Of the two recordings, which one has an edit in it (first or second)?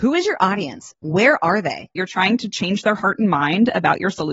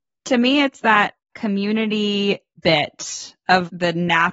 first